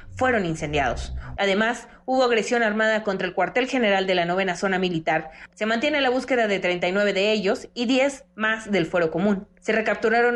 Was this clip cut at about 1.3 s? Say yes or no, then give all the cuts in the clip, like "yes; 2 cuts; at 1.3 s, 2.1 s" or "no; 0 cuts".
yes; 2 cuts; at 1.3 s, 5.5 s